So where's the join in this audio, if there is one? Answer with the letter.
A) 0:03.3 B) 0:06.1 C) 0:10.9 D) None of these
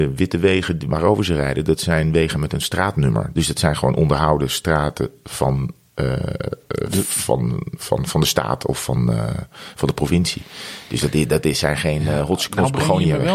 A